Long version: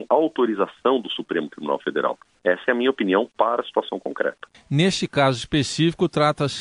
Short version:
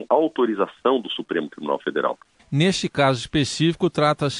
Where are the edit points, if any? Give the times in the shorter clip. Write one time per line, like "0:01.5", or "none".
0:02.4